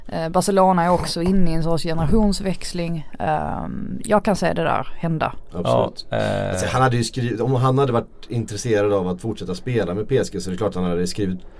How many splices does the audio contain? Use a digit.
1